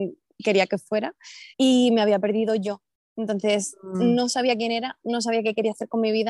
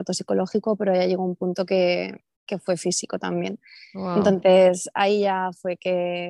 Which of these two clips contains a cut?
first; 1 cut; at 1.5 s

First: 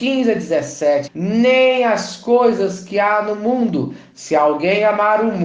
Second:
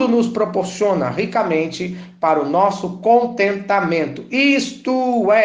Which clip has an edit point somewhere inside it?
first; 1 cut; at 1.1 s

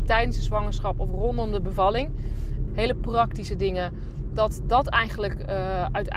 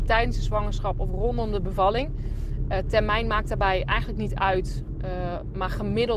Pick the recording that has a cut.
first; 1 cut; at 2.7 s

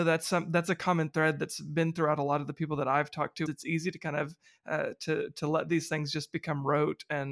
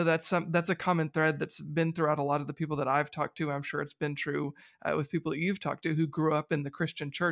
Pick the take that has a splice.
first; 1 cut; at 3.5 s

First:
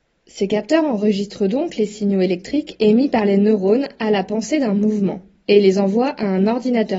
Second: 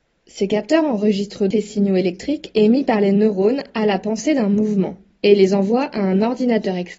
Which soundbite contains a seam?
second; 1 cut; at 1.5 s

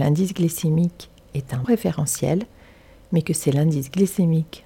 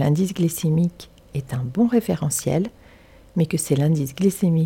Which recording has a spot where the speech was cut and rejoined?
first; 1 cut; at 1.6 s

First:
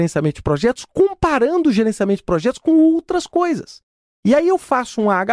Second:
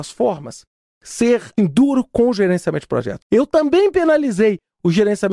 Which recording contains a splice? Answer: second; 2 cuts; at 1.6 s, 3.2 s

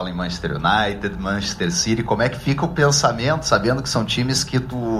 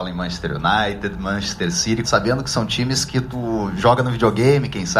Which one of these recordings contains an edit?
second; 1 cut; at 2.0 s

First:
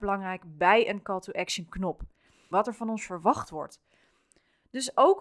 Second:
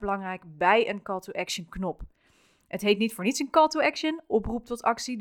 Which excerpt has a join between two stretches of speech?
first; 1 cut; at 2.5 s

